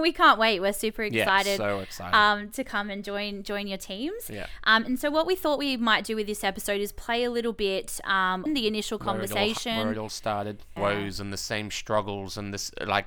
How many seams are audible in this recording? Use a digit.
2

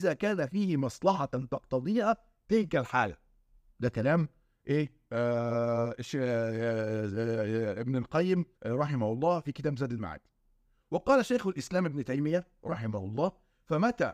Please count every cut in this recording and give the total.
1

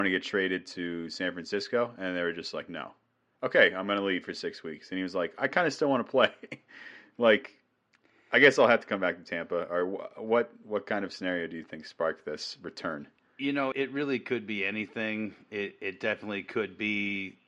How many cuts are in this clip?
1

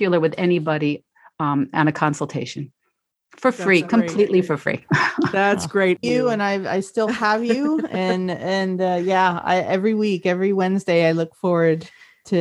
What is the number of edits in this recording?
1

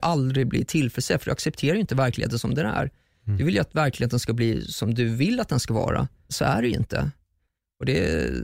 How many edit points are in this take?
1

